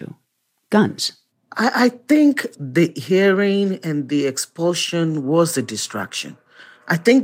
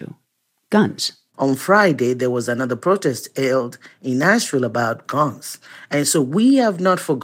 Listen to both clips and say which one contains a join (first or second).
second